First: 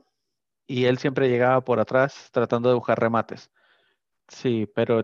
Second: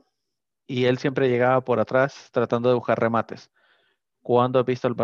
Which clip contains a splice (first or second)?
first